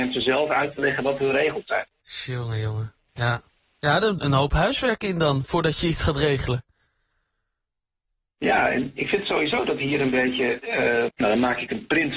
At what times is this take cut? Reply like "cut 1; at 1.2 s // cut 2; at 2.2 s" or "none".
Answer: cut 1; at 4.2 s // cut 2; at 11.1 s